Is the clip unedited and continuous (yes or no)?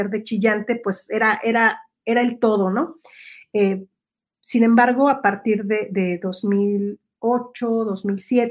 yes